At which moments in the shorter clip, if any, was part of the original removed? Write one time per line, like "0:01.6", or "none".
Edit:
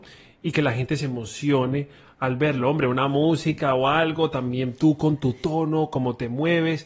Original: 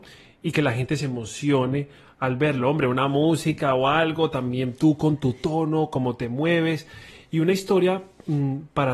none